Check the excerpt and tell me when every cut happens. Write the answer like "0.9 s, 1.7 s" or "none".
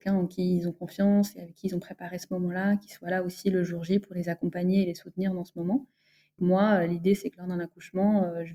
6.4 s